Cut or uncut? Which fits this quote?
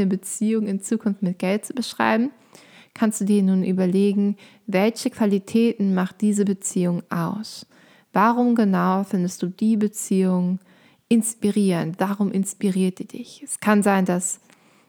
uncut